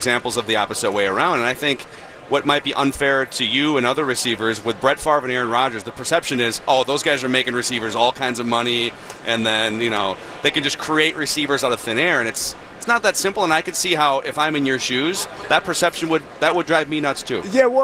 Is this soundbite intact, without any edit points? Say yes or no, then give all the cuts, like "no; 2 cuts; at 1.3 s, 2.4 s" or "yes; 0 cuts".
yes; 0 cuts